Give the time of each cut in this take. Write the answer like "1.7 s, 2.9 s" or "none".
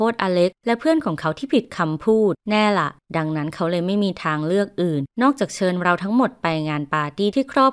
none